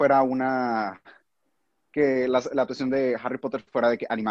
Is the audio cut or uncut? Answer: uncut